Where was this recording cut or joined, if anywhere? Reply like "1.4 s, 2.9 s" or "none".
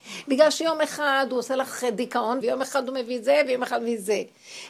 2.4 s